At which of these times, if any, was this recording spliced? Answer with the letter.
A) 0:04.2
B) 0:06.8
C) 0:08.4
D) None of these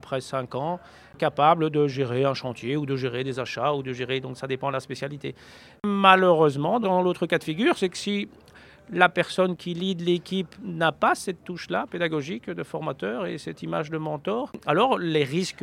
B